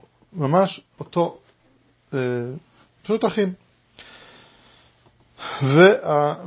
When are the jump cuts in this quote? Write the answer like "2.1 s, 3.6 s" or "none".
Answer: none